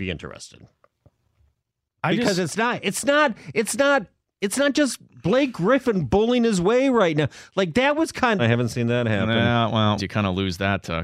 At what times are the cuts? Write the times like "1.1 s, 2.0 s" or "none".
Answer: 8.4 s, 10.0 s